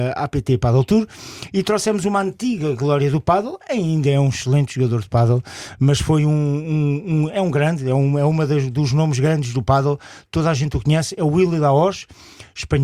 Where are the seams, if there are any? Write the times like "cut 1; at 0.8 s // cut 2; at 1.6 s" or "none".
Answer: none